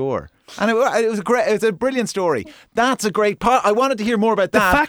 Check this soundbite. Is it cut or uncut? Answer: uncut